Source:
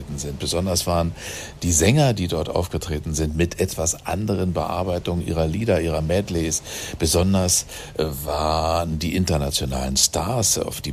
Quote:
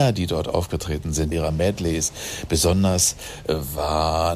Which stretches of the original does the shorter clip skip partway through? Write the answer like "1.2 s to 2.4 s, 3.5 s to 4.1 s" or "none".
3.3 s to 5.8 s